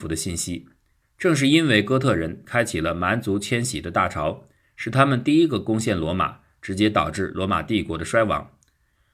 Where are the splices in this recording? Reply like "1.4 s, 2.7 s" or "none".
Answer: 1.0 s